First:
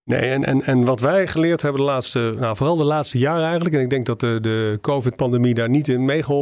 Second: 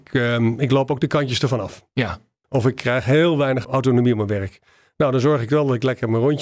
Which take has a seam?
second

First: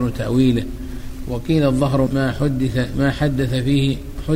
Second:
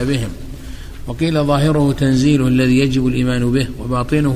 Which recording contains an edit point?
first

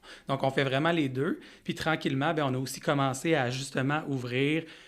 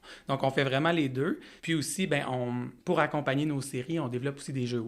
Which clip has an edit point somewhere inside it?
second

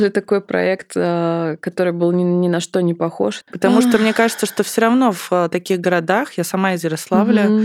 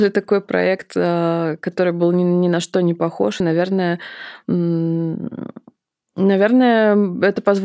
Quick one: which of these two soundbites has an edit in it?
first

